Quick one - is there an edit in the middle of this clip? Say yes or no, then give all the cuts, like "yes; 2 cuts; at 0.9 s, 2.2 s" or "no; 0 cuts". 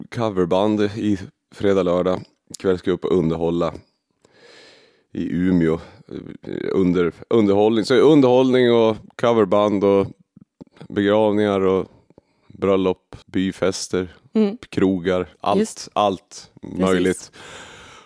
yes; 2 cuts; at 13.2 s, 15.3 s